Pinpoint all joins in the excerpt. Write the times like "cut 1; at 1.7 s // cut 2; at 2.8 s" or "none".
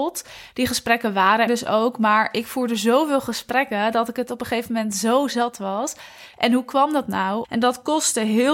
cut 1; at 1.5 s // cut 2; at 6.3 s // cut 3; at 7.4 s